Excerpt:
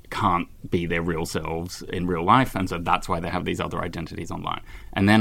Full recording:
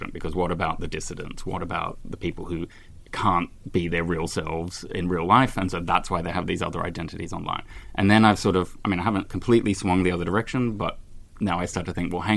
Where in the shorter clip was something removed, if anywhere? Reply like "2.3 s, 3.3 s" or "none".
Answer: none